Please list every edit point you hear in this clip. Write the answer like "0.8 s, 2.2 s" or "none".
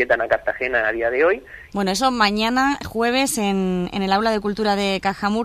1.7 s